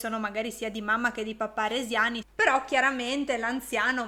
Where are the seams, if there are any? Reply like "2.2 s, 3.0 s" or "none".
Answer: 2.2 s